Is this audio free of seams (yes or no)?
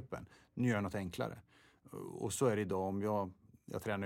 yes